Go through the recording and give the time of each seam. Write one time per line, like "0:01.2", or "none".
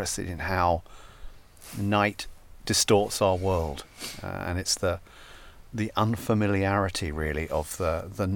0:05.7